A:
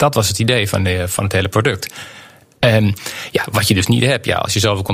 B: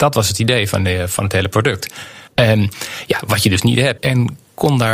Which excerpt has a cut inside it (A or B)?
B